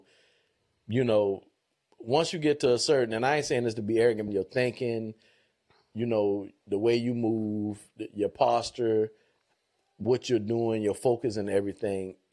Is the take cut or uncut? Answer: cut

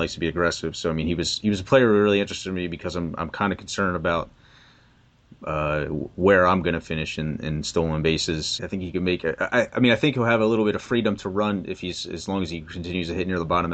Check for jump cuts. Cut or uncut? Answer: cut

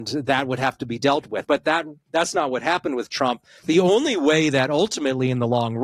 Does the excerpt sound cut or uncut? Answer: cut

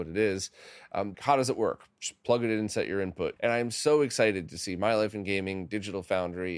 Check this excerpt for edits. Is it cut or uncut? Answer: cut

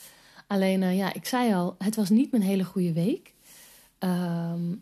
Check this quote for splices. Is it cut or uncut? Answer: uncut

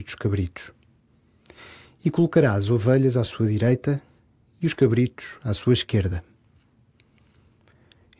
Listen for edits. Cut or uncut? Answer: uncut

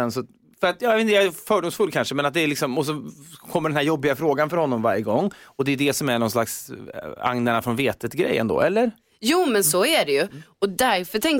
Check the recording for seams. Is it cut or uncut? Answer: uncut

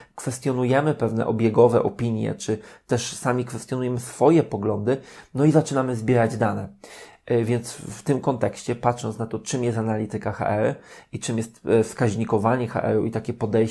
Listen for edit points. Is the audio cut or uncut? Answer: uncut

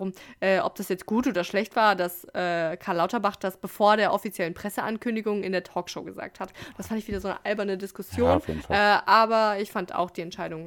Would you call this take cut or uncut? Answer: uncut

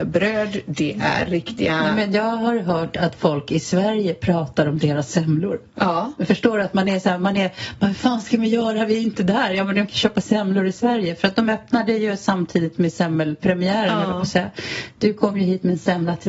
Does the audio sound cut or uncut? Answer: uncut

